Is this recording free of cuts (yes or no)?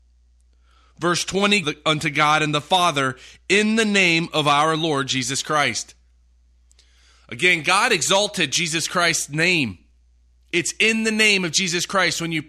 no